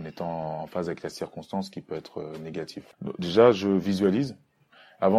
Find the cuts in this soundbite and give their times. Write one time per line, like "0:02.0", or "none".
none